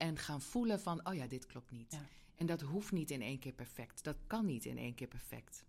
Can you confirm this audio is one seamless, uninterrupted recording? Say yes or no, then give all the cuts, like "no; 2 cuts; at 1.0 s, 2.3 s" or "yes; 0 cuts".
no; 1 cut; at 1.3 s